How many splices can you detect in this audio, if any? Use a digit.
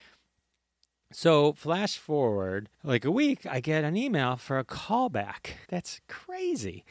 2